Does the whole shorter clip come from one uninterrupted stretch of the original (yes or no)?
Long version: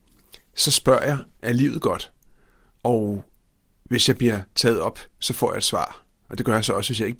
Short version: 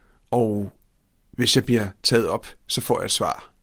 yes